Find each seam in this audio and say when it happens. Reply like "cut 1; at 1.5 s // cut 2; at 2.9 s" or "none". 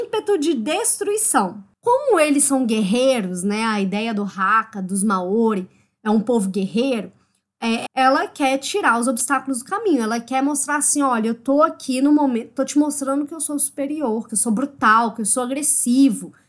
cut 1; at 7.9 s // cut 2; at 14.3 s